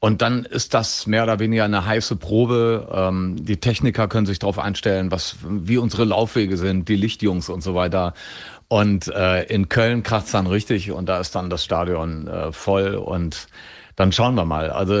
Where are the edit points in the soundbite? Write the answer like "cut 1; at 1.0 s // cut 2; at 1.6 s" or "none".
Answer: none